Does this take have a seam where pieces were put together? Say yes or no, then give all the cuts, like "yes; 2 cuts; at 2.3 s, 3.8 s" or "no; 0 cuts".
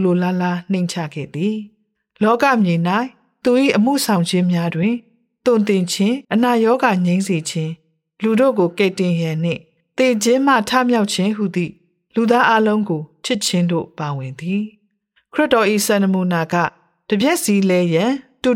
yes; 1 cut; at 6.2 s